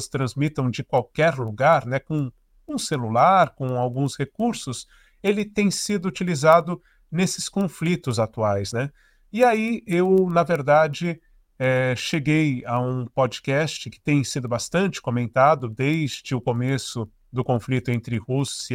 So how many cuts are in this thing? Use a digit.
0